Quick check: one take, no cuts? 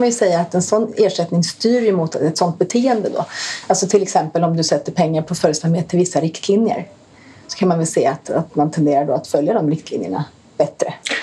yes; 0 cuts

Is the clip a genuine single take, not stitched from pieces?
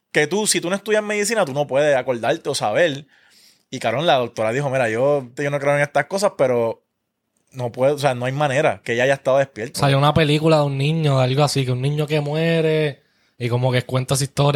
no; 2 cuts; at 5.4 s, 9.7 s

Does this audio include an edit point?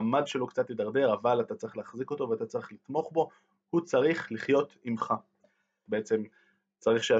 yes; 1 cut; at 5.9 s

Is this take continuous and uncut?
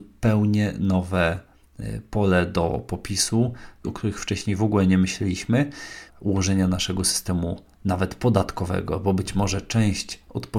no; 2 cuts; at 3.8 s, 6.1 s

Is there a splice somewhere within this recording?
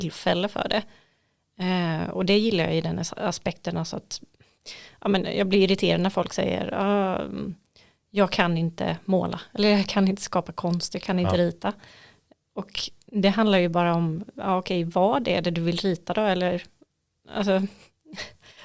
no; 0 cuts

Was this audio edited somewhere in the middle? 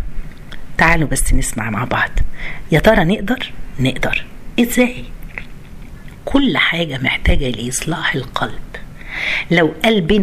no; 0 cuts

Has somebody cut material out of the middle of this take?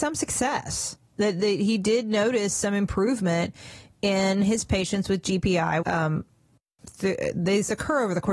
yes; 1 cut; at 5.8 s

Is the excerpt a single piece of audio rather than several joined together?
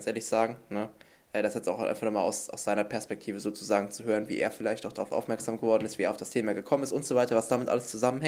yes; 0 cuts

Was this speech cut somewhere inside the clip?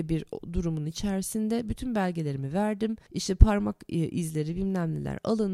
yes; 1 cut; at 3.1 s

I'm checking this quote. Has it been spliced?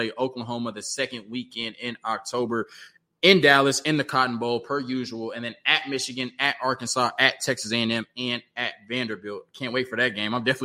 no; 0 cuts

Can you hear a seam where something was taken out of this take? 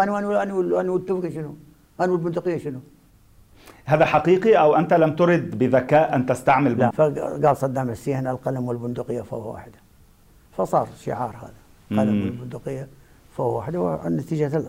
yes; 1 cut; at 6.9 s

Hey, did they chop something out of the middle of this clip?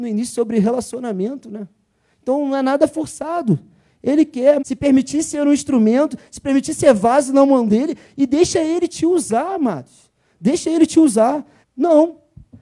yes; 2 cuts; at 4.6 s, 11.6 s

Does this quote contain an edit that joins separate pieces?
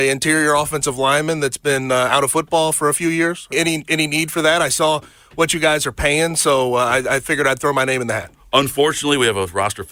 yes; 1 cut; at 3.5 s

